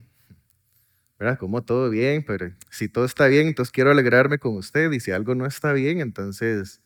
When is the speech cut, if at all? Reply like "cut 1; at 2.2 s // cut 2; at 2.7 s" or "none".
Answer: none